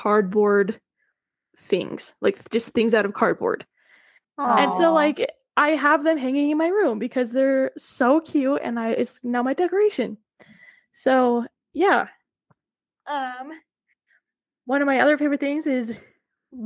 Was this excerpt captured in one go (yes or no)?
no